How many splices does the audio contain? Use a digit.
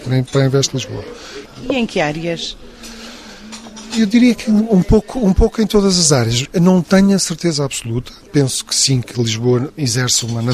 2